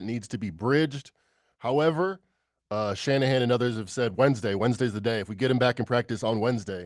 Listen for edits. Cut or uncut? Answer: uncut